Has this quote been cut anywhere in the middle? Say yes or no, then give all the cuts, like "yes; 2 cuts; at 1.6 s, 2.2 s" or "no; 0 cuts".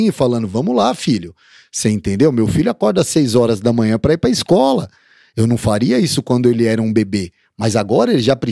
no; 0 cuts